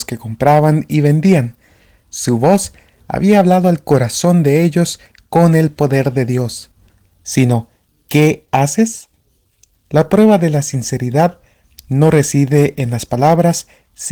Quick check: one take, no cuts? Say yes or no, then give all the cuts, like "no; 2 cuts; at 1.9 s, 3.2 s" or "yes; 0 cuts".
no; 2 cuts; at 7.0 s, 9.7 s